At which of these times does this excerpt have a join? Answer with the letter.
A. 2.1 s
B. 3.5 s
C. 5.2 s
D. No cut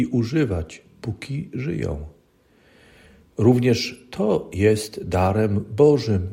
D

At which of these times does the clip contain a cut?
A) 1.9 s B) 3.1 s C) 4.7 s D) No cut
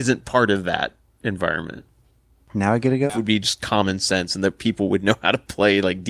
B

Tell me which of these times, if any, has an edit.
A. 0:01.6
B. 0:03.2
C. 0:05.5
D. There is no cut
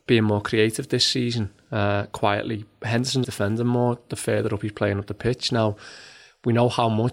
B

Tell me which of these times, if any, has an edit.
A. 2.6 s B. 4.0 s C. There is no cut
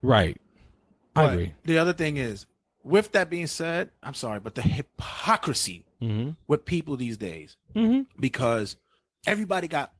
B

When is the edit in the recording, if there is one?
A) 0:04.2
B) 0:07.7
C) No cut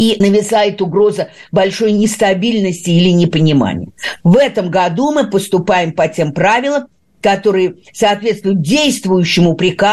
A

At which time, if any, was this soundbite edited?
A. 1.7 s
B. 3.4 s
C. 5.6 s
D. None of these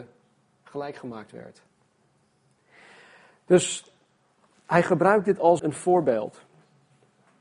C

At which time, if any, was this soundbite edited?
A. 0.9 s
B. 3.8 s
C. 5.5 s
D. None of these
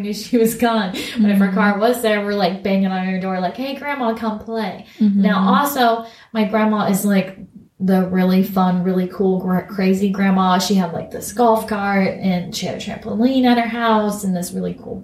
D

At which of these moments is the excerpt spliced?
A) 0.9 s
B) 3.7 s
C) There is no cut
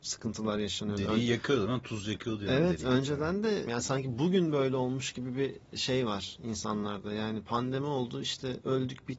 B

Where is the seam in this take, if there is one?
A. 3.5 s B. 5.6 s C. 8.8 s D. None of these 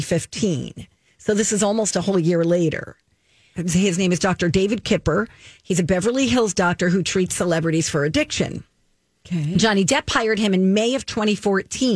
A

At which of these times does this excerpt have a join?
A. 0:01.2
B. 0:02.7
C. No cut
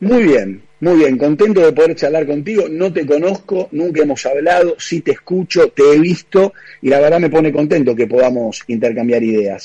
C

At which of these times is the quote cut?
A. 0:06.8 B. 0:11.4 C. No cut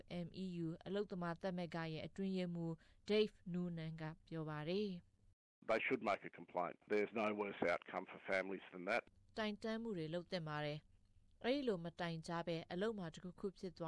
A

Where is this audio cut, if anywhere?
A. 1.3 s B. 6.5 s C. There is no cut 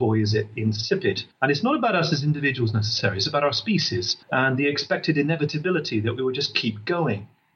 A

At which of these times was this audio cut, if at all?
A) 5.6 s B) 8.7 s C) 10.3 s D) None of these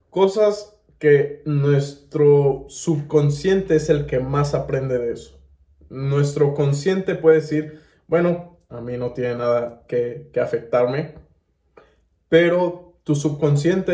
B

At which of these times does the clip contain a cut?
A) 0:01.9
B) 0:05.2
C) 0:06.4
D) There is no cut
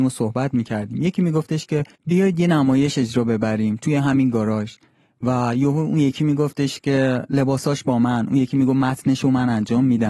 A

